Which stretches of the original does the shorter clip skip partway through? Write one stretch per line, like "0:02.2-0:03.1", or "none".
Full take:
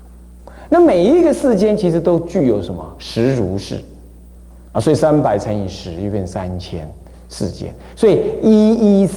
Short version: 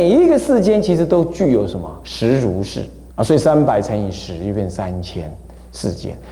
0:04.0-0:04.7